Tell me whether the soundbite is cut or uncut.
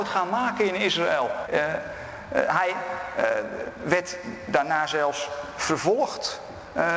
cut